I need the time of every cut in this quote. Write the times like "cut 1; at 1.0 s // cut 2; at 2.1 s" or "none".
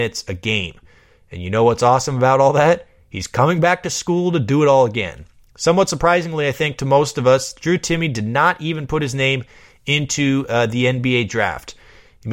none